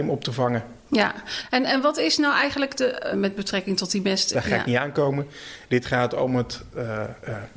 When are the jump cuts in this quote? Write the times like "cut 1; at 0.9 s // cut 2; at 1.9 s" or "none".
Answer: cut 1; at 3.1 s // cut 2; at 4.3 s